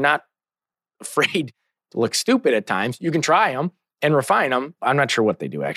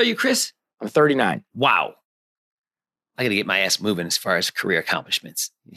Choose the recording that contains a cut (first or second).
first